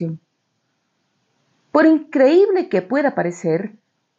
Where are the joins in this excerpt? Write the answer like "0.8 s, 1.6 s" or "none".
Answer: none